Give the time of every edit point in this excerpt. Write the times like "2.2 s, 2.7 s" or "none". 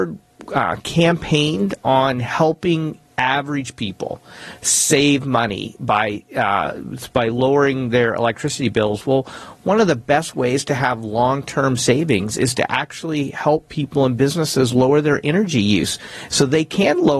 none